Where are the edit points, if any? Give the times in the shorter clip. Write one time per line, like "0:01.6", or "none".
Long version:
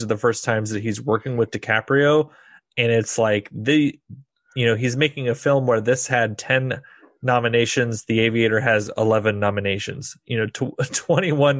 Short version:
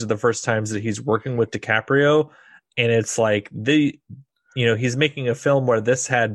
none